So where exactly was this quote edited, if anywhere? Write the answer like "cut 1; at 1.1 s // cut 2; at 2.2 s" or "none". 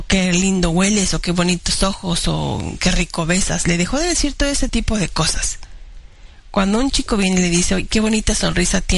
none